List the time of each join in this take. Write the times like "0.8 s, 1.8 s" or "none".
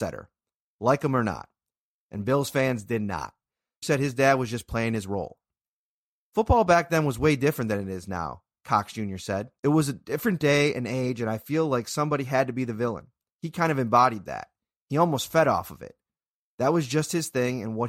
3.8 s, 9.6 s